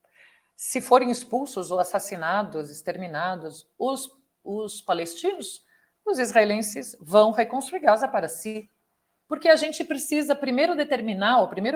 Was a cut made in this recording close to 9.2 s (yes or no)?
yes